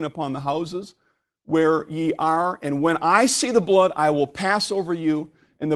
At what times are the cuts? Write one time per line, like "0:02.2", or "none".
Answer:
none